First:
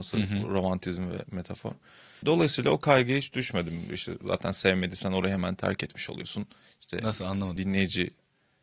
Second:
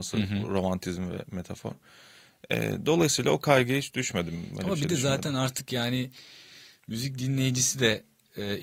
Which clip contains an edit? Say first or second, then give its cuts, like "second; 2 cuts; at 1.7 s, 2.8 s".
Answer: first; 3 cuts; at 2.2 s, 3.9 s, 7.6 s